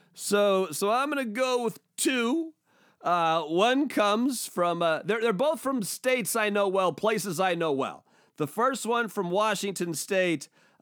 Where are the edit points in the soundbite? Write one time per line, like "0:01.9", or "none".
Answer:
none